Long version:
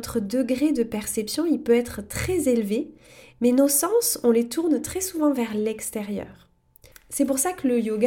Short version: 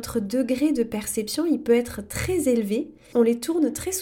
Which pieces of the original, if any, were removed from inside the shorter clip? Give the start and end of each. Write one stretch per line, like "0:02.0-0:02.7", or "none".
0:03.1-0:04.2